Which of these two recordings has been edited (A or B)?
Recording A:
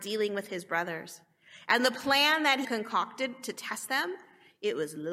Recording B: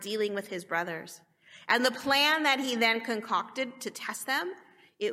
A